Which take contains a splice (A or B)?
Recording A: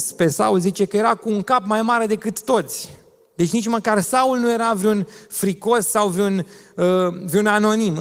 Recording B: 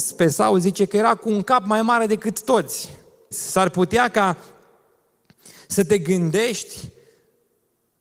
B